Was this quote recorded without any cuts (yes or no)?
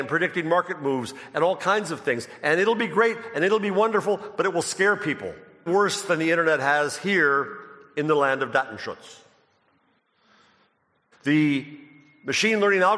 no